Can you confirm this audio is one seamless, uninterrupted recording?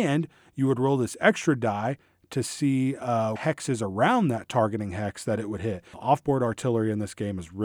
no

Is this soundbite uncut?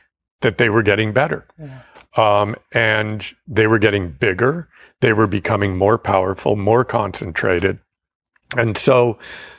yes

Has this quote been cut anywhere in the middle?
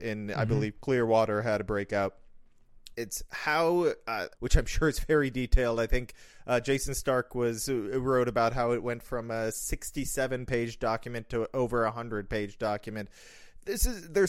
yes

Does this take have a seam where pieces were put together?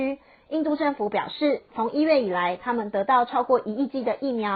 no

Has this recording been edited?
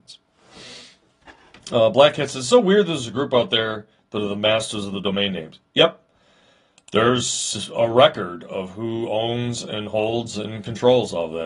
no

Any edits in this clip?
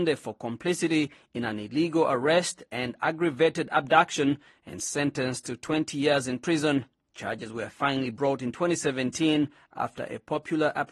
yes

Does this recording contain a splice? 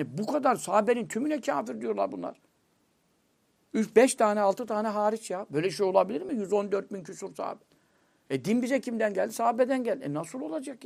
no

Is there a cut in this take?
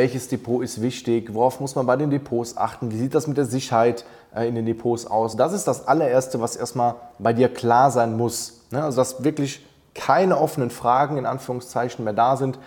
no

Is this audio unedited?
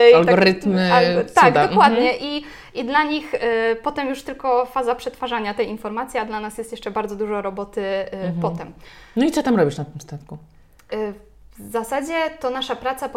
yes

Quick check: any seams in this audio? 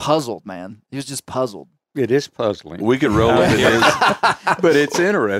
no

